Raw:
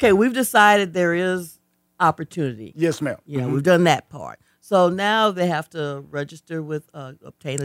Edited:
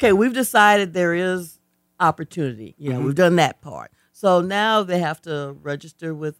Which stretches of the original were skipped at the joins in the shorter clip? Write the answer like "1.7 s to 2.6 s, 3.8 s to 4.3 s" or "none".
2.7 s to 3.2 s